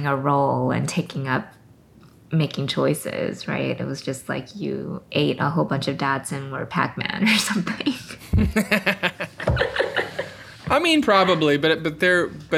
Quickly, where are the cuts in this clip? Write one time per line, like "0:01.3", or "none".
none

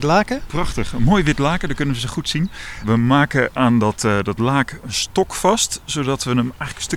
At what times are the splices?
none

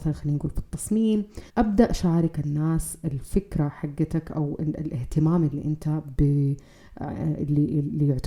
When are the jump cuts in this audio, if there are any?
0:01.5

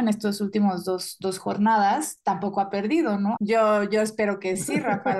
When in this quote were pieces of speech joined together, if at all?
0:03.4

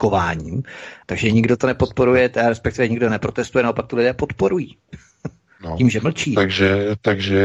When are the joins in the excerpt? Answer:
0:01.0

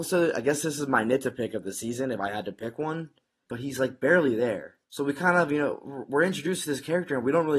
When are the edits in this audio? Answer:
0:03.5
0:04.8

